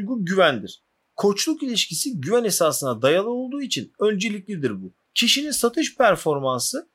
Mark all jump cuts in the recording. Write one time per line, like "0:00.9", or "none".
0:05.0